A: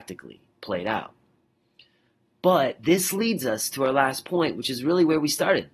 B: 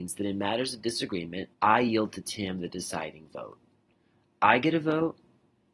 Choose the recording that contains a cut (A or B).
B